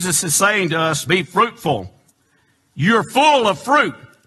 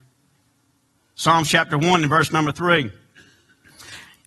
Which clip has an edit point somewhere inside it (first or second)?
first